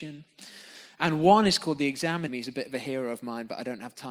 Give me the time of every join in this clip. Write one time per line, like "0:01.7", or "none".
0:02.3